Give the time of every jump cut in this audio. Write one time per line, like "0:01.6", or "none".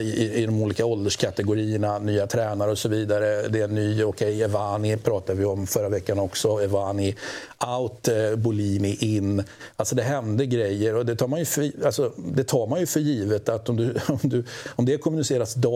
none